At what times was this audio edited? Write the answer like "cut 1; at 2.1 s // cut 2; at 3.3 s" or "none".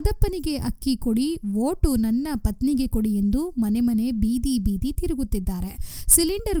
none